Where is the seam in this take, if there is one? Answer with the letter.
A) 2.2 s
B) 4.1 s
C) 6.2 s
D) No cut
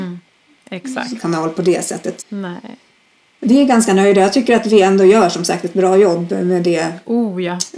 A